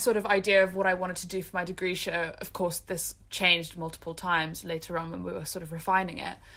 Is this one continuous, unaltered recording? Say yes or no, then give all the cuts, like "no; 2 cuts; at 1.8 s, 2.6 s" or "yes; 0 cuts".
yes; 0 cuts